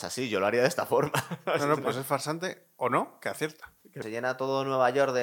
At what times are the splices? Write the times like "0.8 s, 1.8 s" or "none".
none